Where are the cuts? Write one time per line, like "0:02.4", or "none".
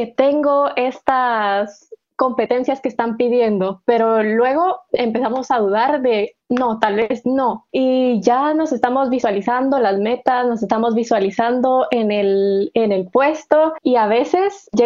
0:07.7
0:13.8